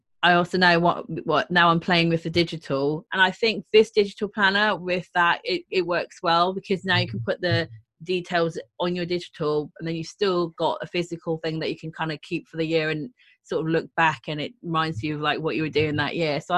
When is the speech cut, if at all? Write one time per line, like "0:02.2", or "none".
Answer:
0:03.1